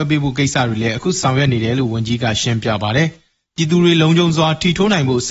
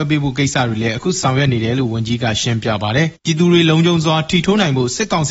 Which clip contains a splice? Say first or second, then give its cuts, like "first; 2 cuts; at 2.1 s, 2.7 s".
second; 1 cut; at 3.2 s